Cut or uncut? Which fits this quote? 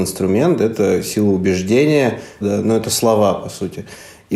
cut